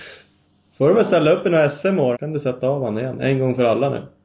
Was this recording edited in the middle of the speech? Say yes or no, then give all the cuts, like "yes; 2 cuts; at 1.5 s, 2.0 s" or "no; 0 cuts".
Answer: yes; 1 cut; at 2.1 s